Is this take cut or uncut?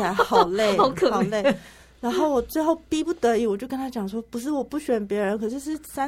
uncut